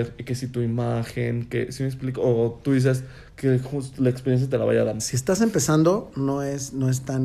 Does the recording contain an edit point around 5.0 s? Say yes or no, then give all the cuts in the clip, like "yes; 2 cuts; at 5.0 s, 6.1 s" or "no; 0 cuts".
yes; 1 cut; at 5.0 s